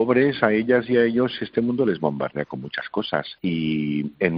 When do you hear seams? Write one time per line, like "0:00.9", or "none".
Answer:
0:03.4